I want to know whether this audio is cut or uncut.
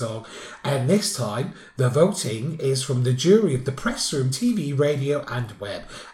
uncut